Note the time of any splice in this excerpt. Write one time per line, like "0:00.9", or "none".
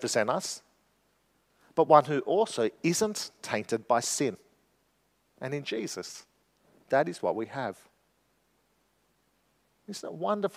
none